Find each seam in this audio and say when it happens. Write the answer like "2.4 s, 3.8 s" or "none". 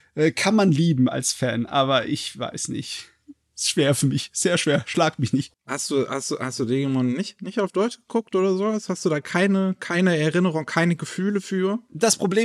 none